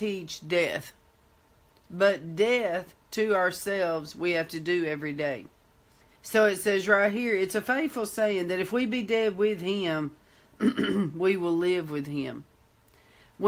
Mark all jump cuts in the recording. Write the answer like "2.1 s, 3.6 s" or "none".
6.2 s